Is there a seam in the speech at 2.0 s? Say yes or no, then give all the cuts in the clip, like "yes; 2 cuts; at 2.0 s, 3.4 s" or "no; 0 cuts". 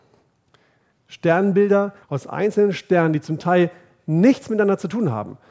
yes; 2 cuts; at 0.9 s, 2.0 s